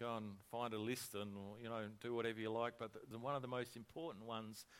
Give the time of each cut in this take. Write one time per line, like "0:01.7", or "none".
0:03.1